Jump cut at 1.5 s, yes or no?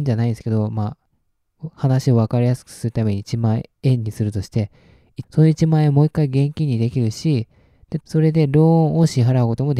no